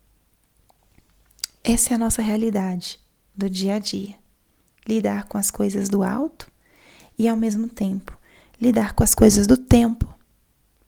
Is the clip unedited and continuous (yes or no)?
yes